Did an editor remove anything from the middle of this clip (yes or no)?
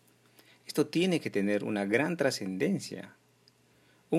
no